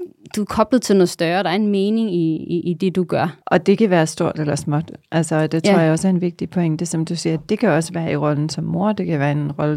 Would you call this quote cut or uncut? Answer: cut